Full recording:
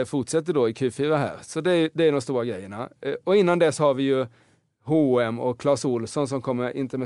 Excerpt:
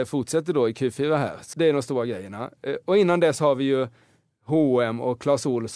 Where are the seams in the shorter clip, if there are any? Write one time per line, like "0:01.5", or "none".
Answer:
0:01.5